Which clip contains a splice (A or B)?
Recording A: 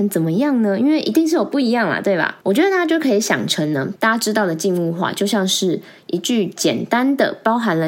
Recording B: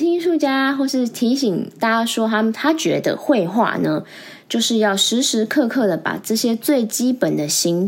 A